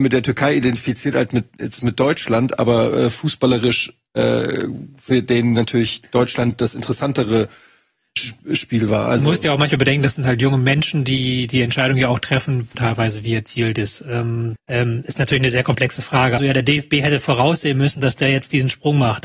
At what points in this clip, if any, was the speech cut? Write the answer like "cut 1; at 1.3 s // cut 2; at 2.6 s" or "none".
cut 1; at 12.7 s // cut 2; at 14.6 s // cut 3; at 16.4 s